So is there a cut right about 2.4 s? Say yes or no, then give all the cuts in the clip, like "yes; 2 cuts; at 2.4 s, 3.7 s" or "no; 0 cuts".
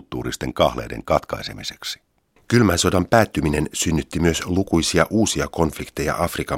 yes; 1 cut; at 2.4 s